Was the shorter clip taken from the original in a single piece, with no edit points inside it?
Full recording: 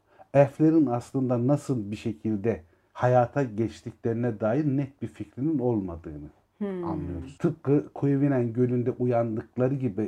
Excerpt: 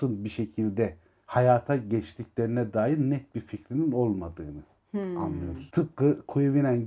yes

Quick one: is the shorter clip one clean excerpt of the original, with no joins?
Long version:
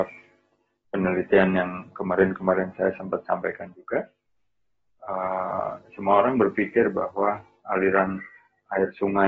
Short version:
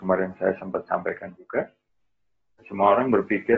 no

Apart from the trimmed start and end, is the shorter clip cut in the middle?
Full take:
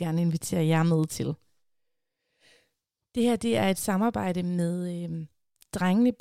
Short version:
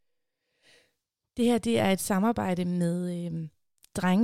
no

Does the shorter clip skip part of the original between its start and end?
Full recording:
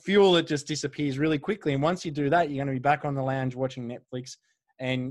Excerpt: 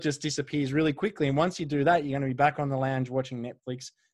no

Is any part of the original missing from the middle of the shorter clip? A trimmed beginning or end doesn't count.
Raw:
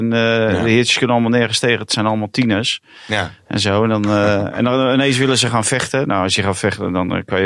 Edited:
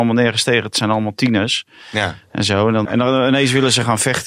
yes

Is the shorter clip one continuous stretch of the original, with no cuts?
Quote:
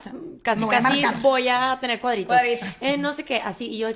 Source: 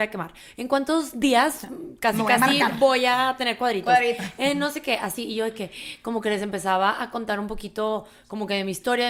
yes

